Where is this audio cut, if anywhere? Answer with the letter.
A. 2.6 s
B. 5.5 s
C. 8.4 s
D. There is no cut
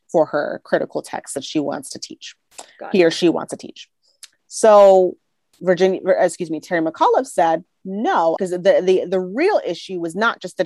C